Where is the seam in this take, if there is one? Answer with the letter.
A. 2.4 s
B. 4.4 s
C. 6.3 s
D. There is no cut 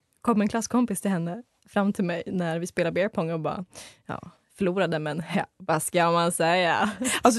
D